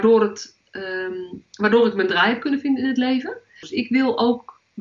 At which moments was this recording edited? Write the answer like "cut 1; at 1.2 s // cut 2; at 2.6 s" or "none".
cut 1; at 3.6 s